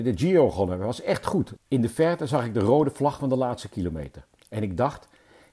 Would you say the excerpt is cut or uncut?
cut